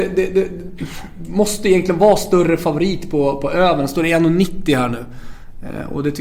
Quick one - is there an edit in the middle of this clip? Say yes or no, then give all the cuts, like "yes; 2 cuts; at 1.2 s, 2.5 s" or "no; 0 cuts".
no; 0 cuts